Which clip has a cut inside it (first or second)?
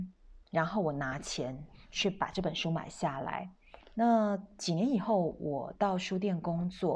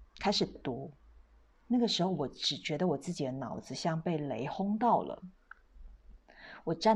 first